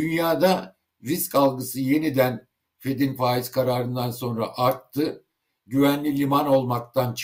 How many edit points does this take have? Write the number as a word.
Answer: zero